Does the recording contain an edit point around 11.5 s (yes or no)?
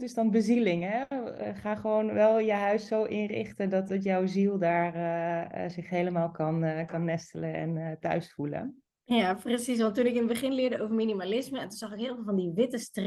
no